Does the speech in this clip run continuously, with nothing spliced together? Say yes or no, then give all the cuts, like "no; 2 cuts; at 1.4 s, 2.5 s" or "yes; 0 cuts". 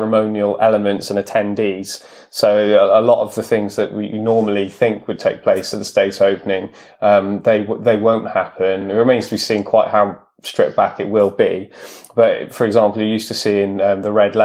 yes; 0 cuts